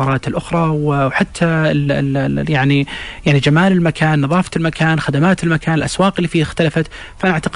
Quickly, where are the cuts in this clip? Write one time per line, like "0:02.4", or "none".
none